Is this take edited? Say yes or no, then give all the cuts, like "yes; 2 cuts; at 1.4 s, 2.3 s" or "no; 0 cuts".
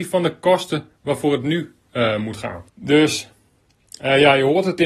yes; 1 cut; at 2.7 s